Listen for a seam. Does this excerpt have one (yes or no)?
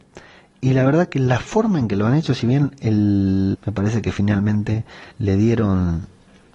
yes